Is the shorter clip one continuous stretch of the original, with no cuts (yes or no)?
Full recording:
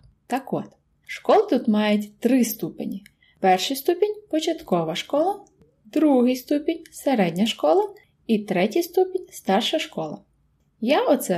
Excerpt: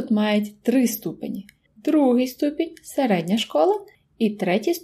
no